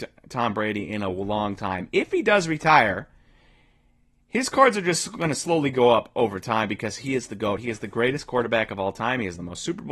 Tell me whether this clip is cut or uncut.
uncut